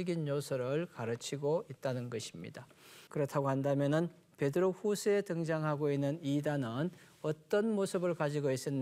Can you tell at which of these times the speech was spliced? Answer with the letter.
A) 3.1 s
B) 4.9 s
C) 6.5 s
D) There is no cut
A